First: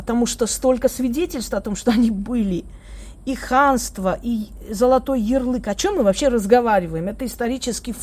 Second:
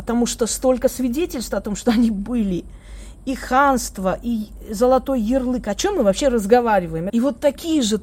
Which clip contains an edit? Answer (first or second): second